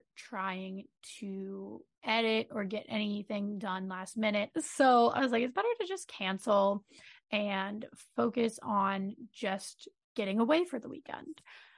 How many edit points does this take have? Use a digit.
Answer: 2